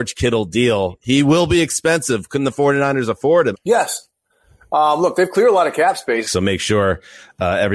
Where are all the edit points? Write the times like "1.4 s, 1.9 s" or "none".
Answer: 3.5 s, 6.2 s